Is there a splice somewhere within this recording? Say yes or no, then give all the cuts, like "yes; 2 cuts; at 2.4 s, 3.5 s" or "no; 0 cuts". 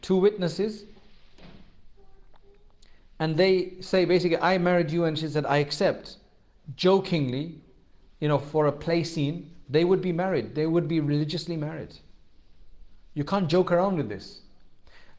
no; 0 cuts